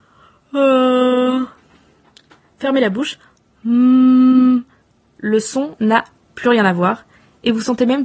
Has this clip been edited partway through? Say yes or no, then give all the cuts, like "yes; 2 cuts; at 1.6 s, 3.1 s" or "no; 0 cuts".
no; 0 cuts